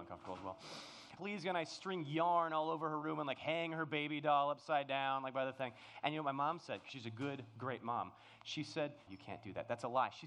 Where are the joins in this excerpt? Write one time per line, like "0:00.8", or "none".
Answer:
0:01.2
0:09.1